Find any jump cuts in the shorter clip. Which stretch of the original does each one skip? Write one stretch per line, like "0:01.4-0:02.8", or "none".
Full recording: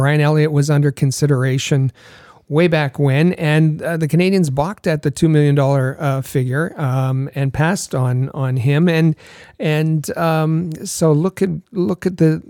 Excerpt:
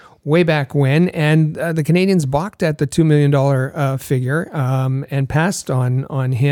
none